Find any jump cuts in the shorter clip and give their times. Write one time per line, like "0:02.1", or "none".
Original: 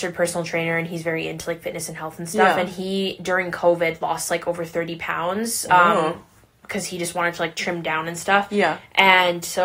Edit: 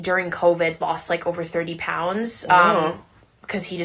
none